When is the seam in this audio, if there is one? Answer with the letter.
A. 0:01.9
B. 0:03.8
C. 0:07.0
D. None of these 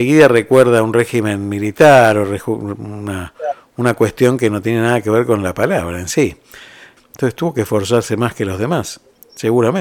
C